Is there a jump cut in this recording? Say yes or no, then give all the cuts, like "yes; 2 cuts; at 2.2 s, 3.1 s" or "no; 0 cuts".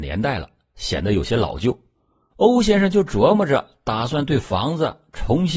yes; 1 cut; at 2.3 s